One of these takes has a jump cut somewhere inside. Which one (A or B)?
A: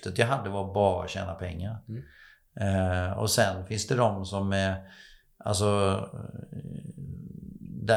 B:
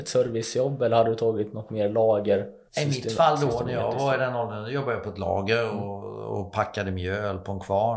B